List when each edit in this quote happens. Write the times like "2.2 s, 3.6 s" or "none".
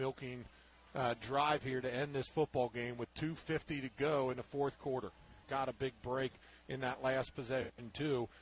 5.4 s